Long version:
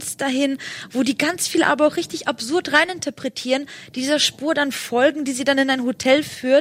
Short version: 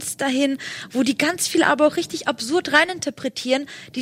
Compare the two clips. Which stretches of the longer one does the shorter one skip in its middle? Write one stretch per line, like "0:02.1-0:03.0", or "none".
none